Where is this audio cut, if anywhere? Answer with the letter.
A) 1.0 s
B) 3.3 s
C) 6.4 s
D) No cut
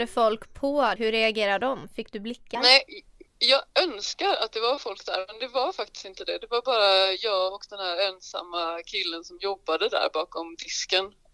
A